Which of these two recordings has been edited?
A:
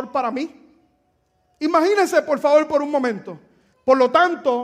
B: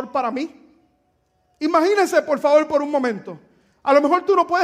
A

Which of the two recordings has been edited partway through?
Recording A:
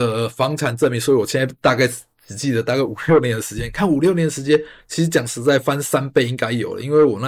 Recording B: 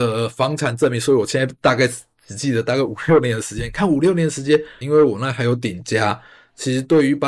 B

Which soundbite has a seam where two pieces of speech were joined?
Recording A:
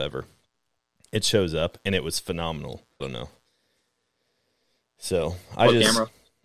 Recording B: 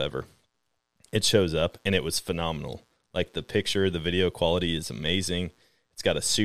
A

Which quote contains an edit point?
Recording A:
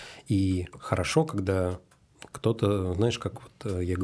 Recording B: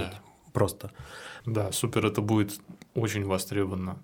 B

